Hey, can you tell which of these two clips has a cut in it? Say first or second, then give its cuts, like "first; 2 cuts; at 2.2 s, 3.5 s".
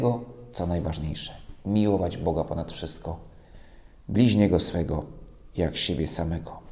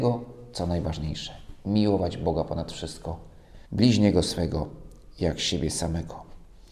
second; 1 cut; at 3.7 s